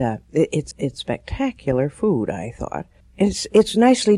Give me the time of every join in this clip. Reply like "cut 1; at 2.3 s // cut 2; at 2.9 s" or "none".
none